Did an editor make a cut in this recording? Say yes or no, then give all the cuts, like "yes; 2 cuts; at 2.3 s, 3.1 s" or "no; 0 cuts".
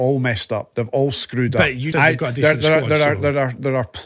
yes; 1 cut; at 1.9 s